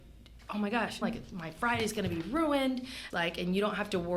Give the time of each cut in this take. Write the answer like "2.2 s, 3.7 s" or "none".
1.0 s, 3.1 s